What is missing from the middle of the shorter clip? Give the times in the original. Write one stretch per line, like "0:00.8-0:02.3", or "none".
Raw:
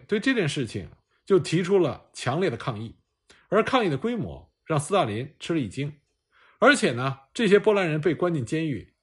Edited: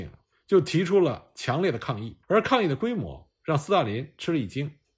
0:03.0-0:03.4